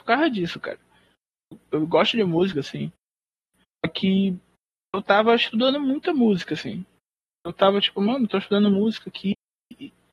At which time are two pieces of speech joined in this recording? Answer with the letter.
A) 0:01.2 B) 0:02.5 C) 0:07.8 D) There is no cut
B